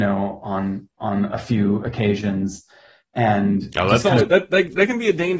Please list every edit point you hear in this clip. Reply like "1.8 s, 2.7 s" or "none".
none